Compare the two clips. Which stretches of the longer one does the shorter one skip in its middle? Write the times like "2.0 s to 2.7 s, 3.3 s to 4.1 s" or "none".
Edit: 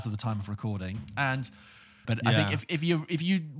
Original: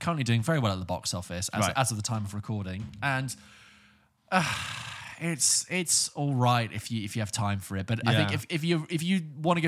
3.9 s to 7.9 s

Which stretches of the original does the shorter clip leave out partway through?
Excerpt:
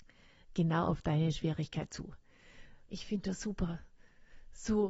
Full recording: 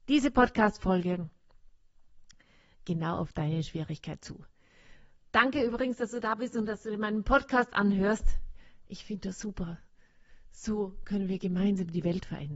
5.2 s to 8.9 s

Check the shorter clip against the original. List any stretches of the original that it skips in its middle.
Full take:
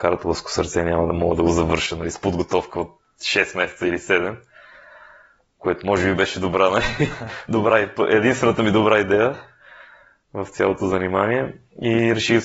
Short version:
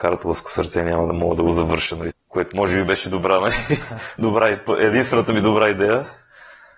2.1 s to 5.4 s

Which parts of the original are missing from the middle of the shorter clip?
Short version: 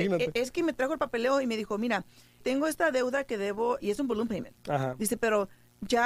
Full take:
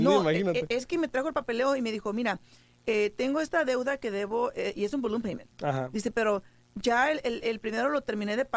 2.8 s to 3.1 s, 4.5 s to 4.7 s

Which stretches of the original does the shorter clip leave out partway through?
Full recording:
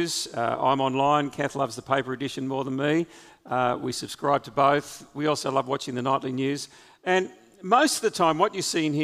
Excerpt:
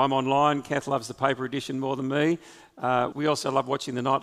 3.8 s to 5.1 s

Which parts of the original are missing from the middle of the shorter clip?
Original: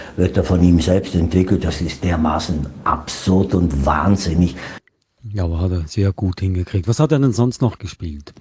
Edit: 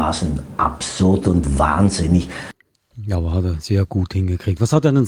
none

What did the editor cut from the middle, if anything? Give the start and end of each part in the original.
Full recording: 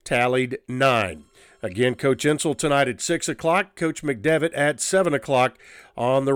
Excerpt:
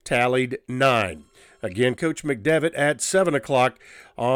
2.0 s to 3.7 s

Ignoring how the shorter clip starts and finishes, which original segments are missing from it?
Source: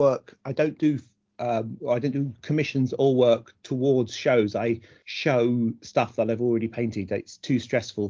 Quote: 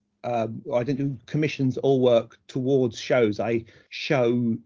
none

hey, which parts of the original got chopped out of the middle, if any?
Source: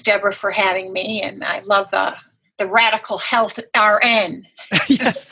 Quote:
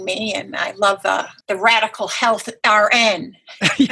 2.3 s to 2.5 s

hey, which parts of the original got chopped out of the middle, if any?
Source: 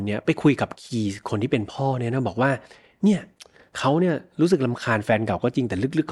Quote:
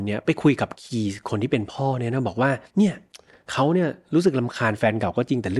2.7 s to 2.9 s

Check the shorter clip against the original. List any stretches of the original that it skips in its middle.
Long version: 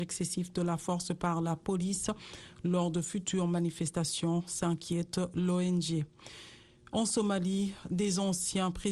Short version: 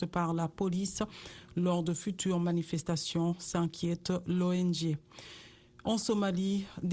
none

